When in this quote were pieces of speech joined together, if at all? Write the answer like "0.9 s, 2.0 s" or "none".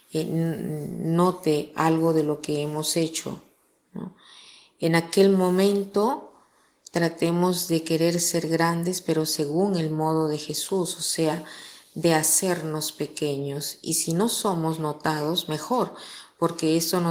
none